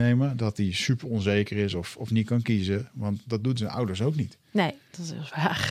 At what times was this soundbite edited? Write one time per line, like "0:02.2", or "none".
none